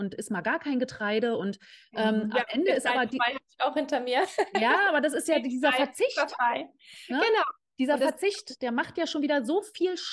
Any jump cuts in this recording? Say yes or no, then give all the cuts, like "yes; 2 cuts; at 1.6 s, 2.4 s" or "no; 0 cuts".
no; 0 cuts